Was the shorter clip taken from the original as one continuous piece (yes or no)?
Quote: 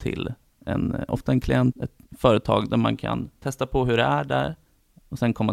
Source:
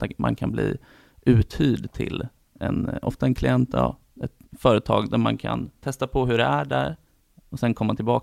no